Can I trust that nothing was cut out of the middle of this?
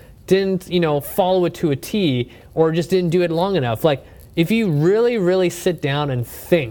yes; 0 cuts

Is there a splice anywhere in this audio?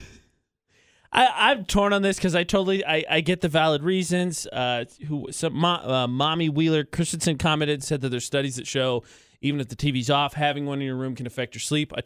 no; 0 cuts

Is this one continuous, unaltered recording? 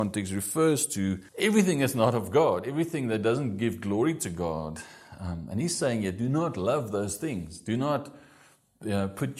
no; 1 cut; at 1.3 s

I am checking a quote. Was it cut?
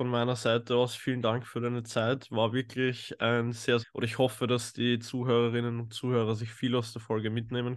yes; 1 cut; at 3.8 s

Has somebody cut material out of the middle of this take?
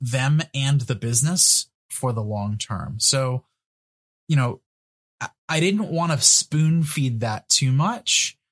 no; 0 cuts

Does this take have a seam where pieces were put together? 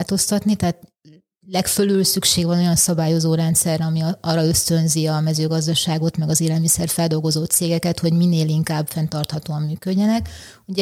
no; 0 cuts

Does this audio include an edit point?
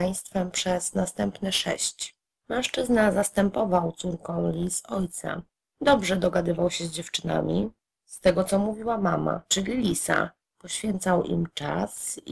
yes; 1 cut; at 9.5 s

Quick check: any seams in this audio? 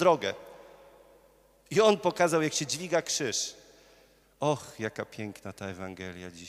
yes; 1 cut; at 4.2 s

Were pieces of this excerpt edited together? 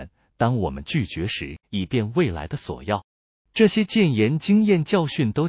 yes; 2 cuts; at 1.6 s, 3.4 s

